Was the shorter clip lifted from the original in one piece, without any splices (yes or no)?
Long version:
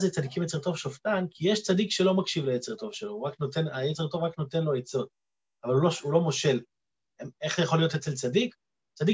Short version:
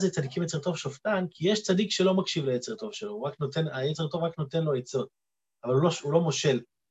yes